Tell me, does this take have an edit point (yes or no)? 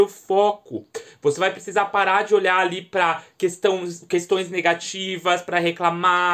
no